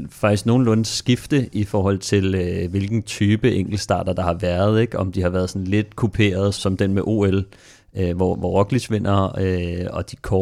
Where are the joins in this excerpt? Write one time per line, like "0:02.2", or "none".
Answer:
0:06.6